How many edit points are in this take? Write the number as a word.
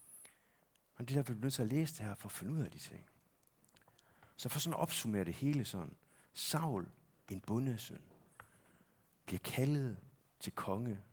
zero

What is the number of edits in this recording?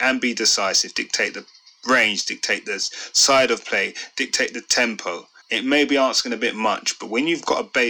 one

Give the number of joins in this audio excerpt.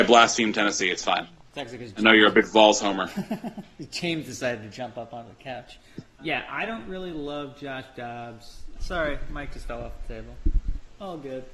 two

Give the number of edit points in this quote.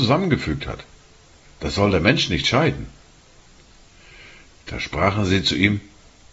zero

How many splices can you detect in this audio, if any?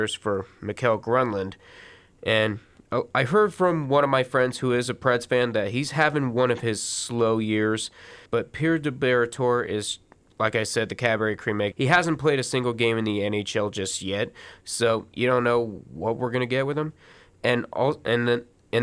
two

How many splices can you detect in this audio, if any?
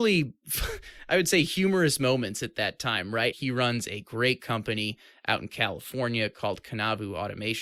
one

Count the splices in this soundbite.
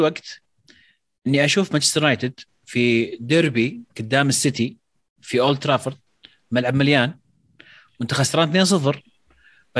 one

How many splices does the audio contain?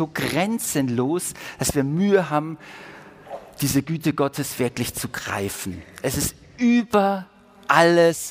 zero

